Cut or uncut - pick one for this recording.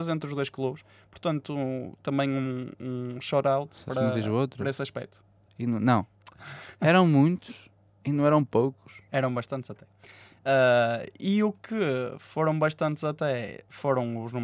cut